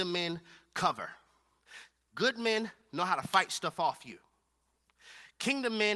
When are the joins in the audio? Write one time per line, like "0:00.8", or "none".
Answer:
none

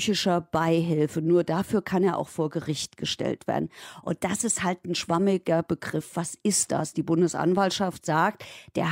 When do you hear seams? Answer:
none

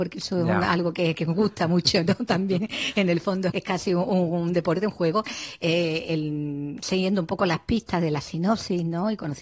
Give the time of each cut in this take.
0:03.5

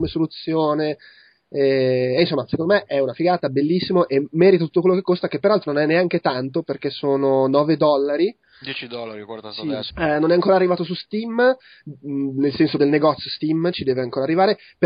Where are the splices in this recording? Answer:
0:09.9
0:12.8

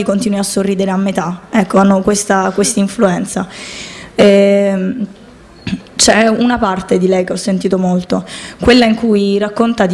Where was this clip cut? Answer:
0:04.1

